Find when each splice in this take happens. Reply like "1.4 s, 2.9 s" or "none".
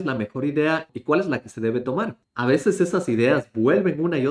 2.2 s